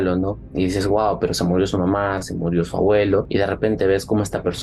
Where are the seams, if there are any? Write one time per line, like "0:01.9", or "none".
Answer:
0:02.2